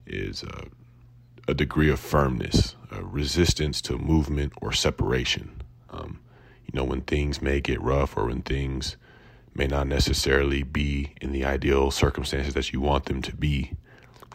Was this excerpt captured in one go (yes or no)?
no